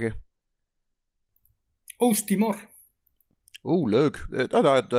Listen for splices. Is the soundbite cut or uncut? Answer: uncut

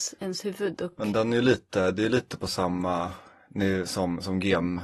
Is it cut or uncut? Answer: uncut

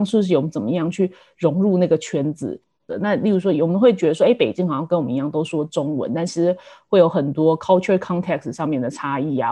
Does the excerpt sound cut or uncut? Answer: cut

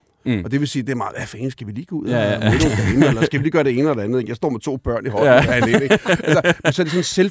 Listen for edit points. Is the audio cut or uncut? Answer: uncut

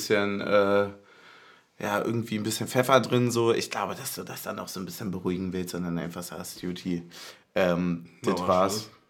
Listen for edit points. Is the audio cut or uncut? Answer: uncut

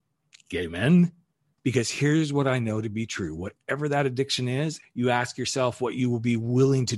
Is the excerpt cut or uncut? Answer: cut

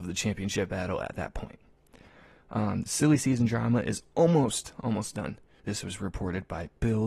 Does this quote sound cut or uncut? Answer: cut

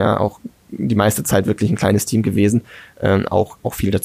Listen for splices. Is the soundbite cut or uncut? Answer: uncut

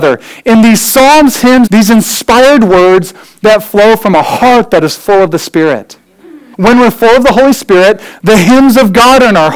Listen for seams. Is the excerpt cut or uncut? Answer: cut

